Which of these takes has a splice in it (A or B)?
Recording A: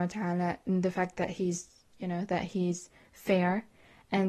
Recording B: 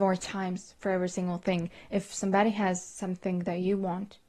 A